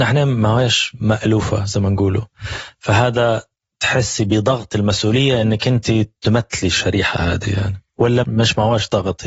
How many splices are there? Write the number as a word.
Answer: one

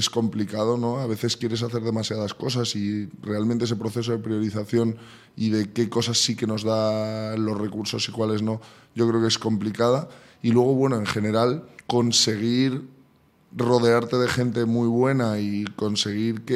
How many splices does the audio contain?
one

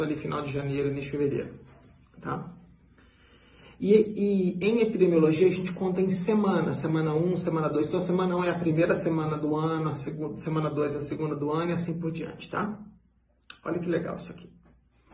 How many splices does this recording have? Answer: zero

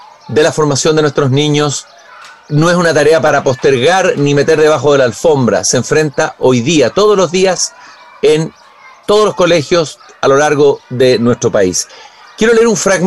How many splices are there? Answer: zero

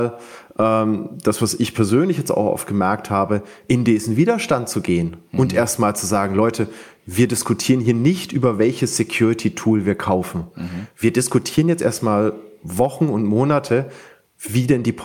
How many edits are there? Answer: zero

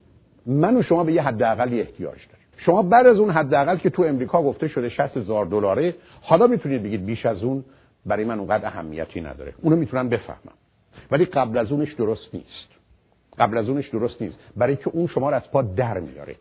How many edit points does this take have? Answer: one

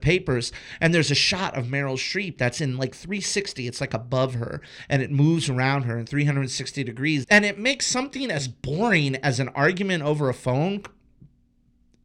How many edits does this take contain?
one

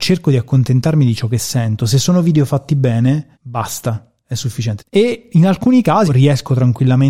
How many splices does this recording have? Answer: three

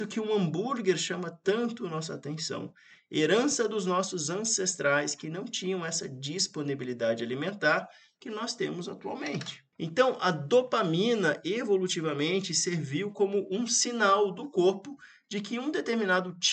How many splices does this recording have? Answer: one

